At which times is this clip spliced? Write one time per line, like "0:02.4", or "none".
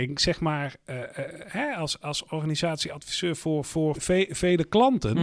0:03.9